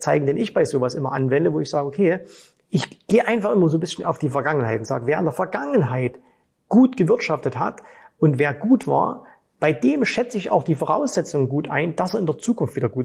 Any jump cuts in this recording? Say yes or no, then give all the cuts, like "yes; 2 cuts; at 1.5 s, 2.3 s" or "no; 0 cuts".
no; 0 cuts